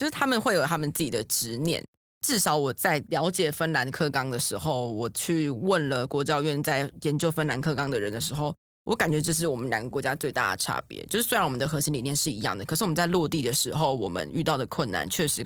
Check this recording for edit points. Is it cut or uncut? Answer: uncut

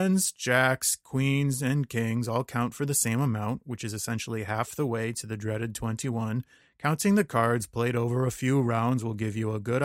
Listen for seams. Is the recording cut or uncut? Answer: uncut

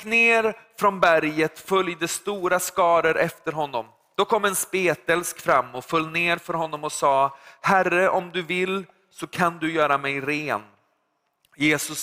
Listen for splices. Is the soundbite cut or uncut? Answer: uncut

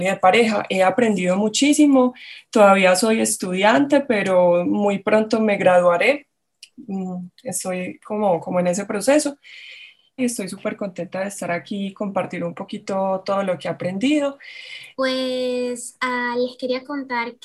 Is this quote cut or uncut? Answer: cut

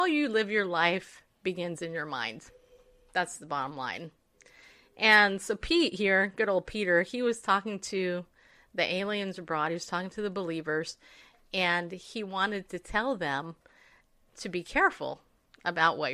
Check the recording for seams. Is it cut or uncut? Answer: uncut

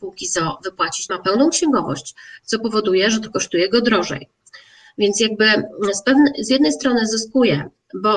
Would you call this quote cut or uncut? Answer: cut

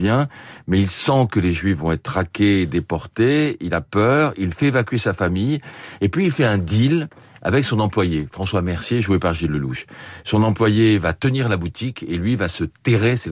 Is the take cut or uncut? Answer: uncut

